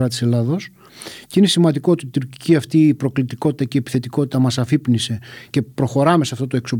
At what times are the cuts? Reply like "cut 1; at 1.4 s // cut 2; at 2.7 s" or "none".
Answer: cut 1; at 5.5 s